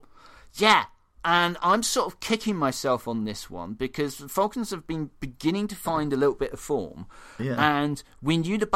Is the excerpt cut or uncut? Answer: uncut